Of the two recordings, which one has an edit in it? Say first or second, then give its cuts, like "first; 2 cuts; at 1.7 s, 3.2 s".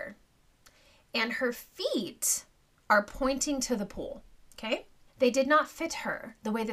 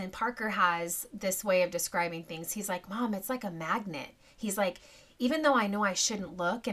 first; 1 cut; at 5.1 s